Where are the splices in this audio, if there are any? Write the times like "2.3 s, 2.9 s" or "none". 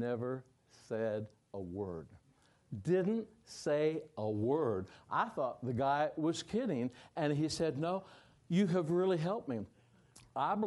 none